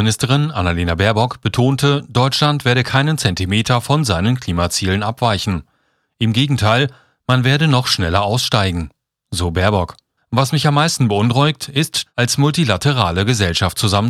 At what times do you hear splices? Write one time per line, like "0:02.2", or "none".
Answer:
0:10.2
0:12.1

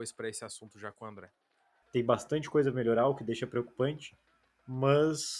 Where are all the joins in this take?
0:01.8

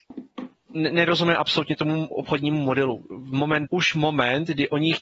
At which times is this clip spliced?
0:03.7

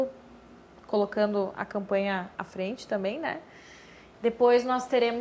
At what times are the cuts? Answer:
0:02.4
0:04.1

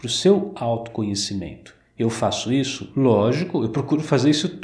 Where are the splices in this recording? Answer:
none

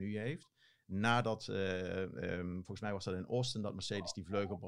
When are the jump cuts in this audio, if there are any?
none

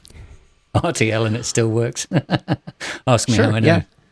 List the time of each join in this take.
none

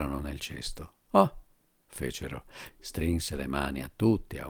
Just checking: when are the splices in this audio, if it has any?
0:01.0
0:02.7

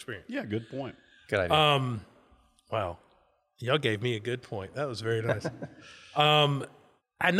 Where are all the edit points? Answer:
none

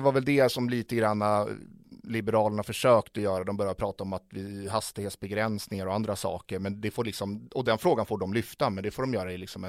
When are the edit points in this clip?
none

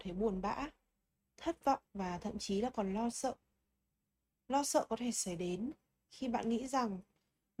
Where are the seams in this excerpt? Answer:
0:01.9

